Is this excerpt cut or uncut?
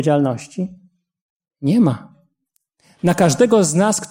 uncut